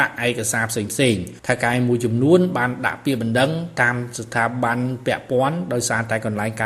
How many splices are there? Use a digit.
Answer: 1